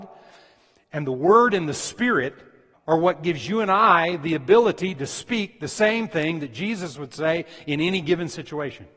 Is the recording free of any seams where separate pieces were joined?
no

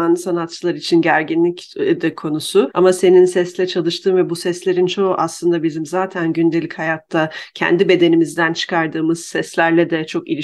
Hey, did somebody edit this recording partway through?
yes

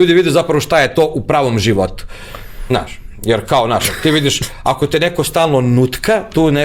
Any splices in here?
no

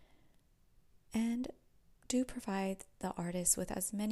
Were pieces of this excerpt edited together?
no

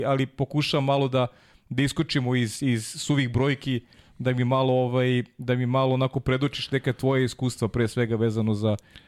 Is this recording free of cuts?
yes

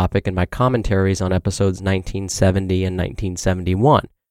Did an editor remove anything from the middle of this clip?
no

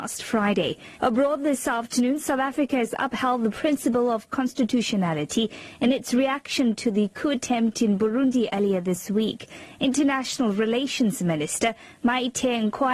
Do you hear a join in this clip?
yes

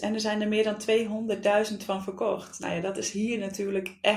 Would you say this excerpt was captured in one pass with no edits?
yes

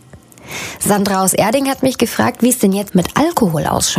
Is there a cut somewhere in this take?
yes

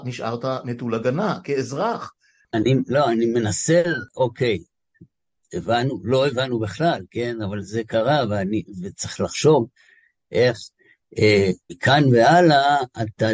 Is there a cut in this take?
yes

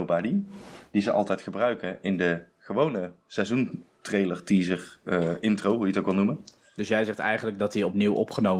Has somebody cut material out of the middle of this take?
no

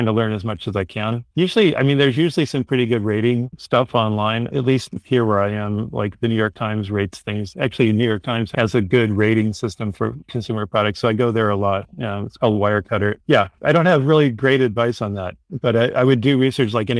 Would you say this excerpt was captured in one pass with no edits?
yes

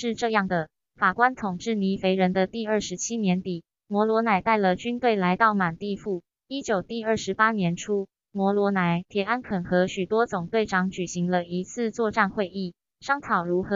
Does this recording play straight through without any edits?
yes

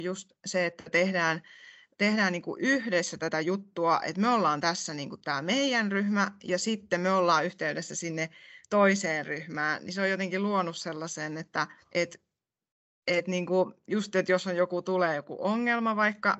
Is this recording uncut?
no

